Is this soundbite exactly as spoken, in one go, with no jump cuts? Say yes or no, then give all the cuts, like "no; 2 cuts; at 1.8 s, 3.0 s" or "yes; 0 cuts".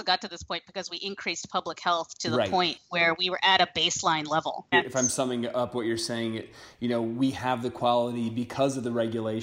no; 1 cut; at 4.7 s